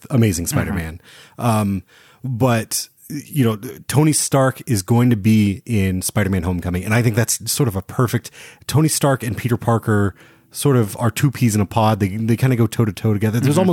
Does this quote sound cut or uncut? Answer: uncut